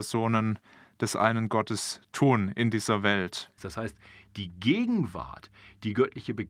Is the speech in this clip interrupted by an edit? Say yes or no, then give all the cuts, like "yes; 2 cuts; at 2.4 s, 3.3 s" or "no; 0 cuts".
yes; 1 cut; at 3.6 s